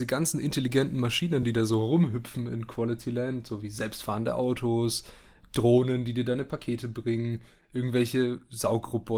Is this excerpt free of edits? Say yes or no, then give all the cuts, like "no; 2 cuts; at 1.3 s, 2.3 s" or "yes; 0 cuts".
yes; 0 cuts